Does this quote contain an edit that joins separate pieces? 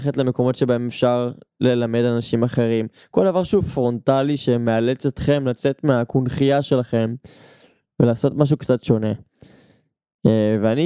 no; 0 cuts

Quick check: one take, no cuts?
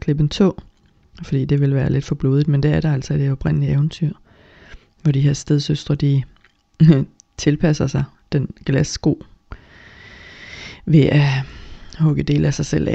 yes; 0 cuts

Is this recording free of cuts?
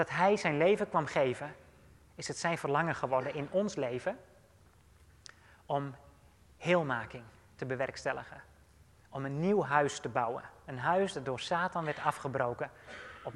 yes; 0 cuts

